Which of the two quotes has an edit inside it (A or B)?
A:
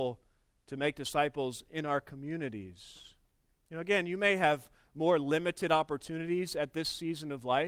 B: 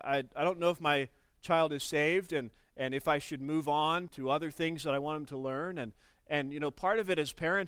B